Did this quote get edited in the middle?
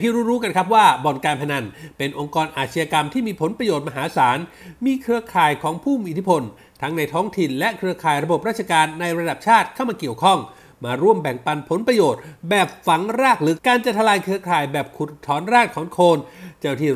yes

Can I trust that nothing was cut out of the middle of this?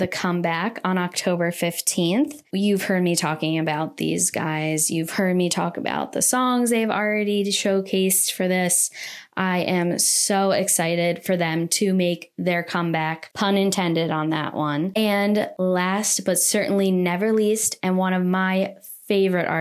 yes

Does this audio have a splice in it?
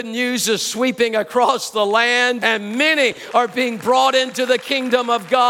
yes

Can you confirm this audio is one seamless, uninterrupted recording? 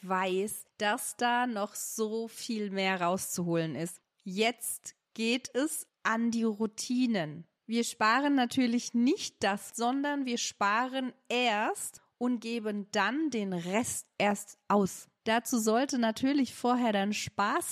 no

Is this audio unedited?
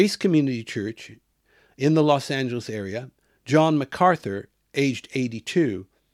yes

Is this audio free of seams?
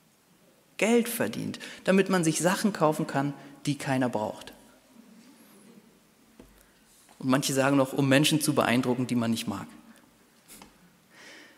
yes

